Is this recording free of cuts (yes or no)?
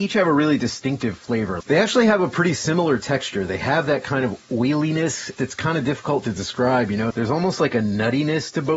no